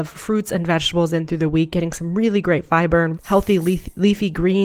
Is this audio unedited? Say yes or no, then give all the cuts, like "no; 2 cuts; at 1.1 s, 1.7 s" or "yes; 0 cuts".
no; 1 cut; at 3.1 s